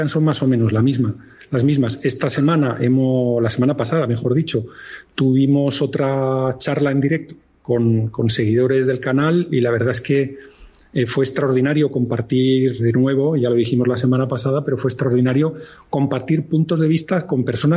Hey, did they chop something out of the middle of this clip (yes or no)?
yes